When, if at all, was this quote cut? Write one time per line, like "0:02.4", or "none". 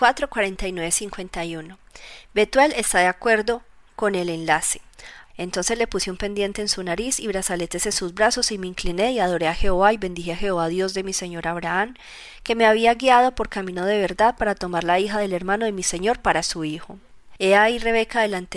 0:05.3
0:17.4